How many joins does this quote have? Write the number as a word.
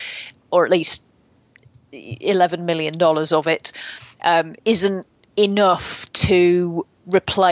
one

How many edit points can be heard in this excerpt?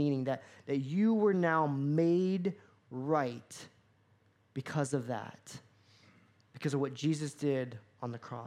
zero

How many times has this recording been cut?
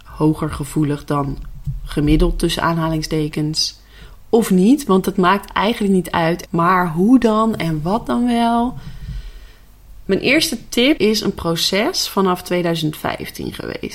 two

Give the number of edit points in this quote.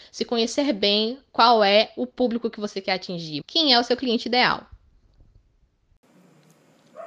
one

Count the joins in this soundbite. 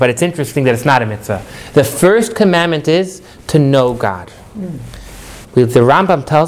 one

